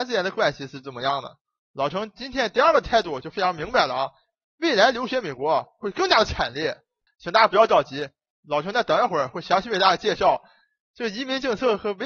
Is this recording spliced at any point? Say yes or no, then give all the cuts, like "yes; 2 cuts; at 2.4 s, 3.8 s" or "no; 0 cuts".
yes; 1 cut; at 7.1 s